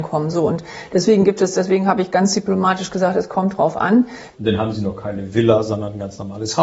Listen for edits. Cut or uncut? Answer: cut